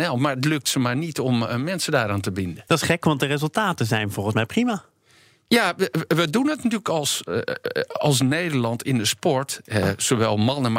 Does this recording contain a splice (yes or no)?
no